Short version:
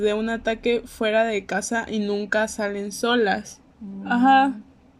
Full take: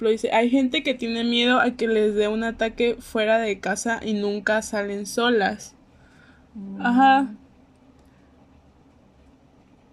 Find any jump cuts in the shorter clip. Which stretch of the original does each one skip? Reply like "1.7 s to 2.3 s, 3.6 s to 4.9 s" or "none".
5.8 s to 6.4 s